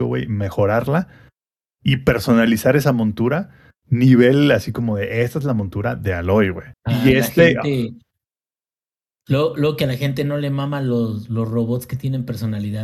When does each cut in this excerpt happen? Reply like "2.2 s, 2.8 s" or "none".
6.7 s